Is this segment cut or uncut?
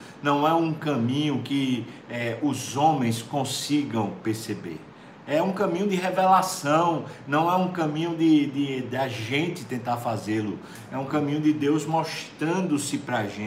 uncut